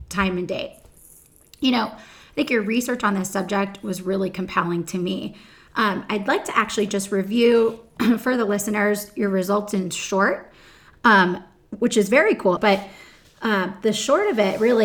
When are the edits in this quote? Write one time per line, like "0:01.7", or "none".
0:10.9
0:12.6